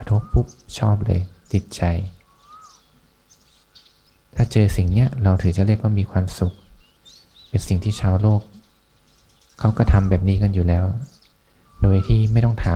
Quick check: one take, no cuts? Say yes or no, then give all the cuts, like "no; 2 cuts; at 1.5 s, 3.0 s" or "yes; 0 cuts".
yes; 0 cuts